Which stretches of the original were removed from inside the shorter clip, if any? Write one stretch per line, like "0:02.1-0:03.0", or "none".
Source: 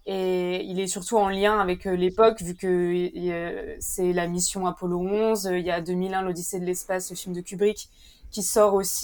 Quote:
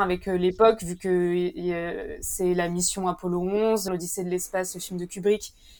0:05.5-0:06.2